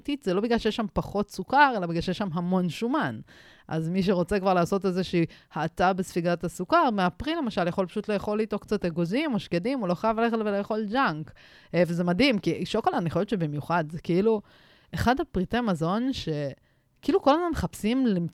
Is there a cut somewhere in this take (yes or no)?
no